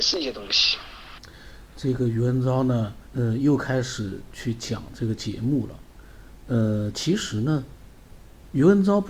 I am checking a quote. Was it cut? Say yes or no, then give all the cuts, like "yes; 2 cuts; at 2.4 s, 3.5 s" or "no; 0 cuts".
yes; 1 cut; at 3.1 s